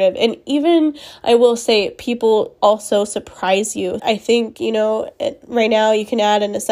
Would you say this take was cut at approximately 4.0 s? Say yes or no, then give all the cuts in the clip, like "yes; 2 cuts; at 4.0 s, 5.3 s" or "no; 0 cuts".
yes; 1 cut; at 4.0 s